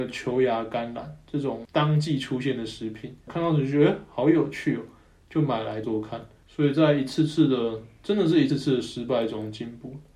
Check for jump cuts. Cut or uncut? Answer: cut